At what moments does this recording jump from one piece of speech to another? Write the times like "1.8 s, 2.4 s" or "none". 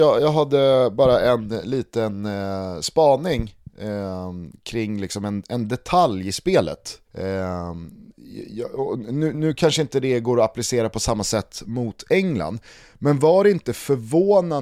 7.0 s, 9.3 s